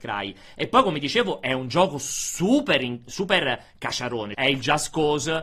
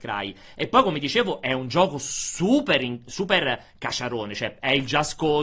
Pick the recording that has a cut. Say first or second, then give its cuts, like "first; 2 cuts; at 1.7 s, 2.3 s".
first; 1 cut; at 4.3 s